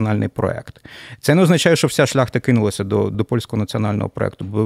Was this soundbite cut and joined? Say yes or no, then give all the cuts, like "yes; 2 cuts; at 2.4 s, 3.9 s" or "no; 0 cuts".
yes; 1 cut; at 3.1 s